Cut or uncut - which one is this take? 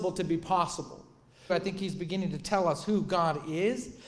cut